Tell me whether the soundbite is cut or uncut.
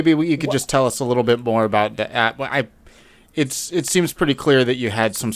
uncut